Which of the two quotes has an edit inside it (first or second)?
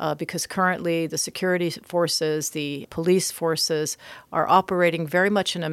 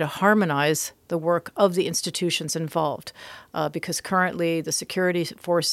first